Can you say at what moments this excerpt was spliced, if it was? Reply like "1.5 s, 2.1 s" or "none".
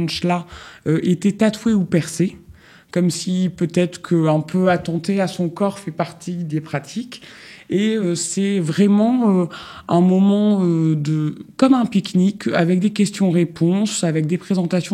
none